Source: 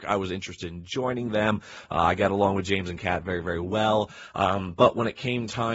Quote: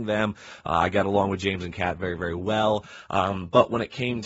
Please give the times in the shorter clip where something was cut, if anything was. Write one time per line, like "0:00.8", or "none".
none